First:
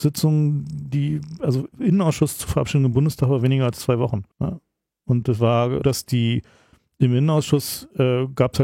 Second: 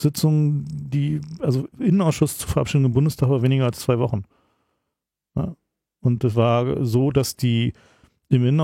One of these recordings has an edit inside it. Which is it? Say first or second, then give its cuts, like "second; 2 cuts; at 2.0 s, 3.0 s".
first; 2 cuts; at 4.3 s, 5.8 s